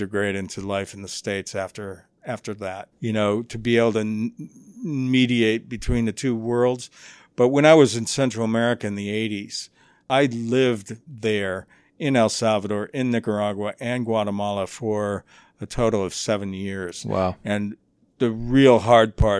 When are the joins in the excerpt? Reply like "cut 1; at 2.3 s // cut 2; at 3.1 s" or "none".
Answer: cut 1; at 2.9 s // cut 2; at 11.1 s